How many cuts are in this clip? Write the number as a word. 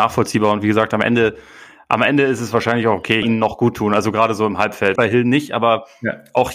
two